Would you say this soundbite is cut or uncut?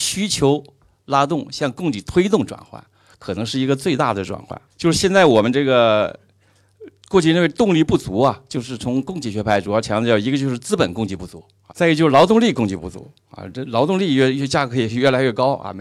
cut